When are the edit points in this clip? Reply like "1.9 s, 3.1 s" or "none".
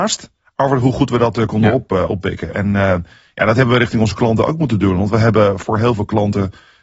none